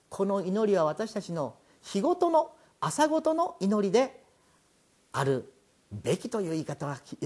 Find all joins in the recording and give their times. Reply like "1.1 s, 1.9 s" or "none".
none